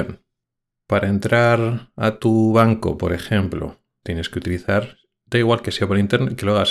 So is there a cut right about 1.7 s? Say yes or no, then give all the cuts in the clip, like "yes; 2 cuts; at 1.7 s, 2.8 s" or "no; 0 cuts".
no; 1 cut; at 4.0 s